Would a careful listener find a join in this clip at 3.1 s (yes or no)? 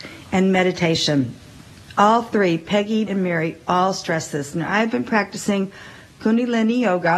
yes